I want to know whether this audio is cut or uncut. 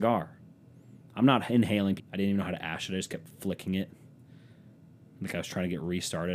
cut